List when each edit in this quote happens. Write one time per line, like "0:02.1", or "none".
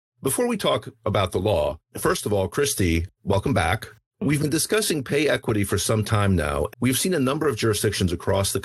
0:06.7